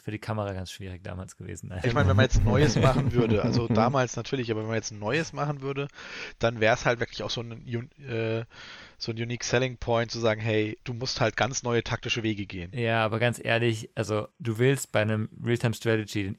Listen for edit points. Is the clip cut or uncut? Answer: cut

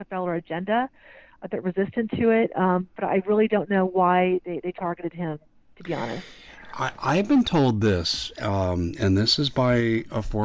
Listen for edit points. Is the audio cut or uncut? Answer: uncut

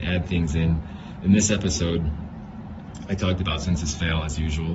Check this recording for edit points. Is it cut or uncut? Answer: uncut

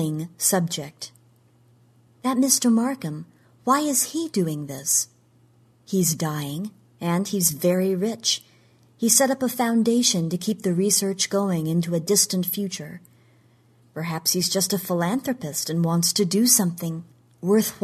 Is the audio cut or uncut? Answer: uncut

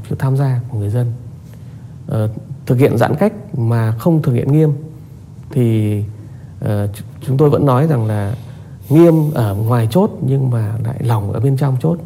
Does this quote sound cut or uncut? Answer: uncut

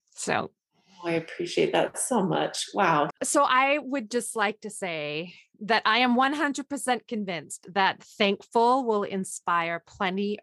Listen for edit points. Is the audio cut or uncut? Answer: cut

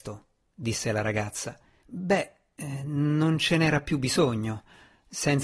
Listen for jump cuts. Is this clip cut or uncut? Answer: cut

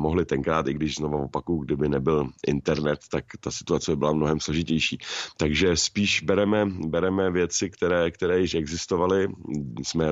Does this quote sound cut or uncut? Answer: uncut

